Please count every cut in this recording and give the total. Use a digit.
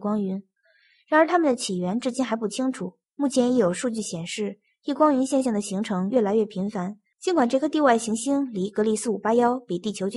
2